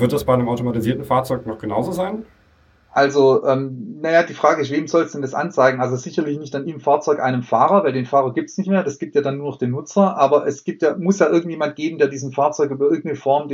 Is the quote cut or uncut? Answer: uncut